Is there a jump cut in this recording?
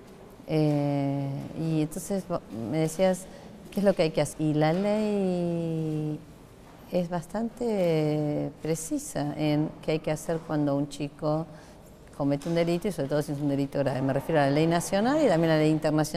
yes; 1 cut; at 4.3 s

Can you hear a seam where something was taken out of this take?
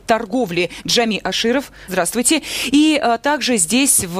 yes; 1 cut; at 1.9 s

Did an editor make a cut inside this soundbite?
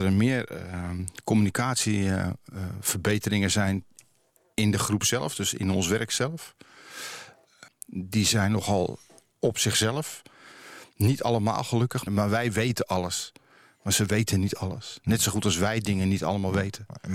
yes; 2 cuts; at 7.7 s, 12.1 s

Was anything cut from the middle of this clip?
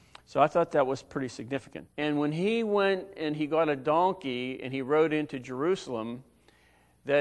yes; 1 cut; at 1.9 s

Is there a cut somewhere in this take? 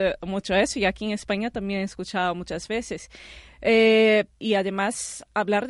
yes; 1 cut; at 4.4 s

